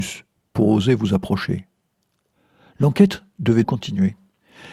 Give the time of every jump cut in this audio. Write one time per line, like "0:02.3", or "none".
0:03.6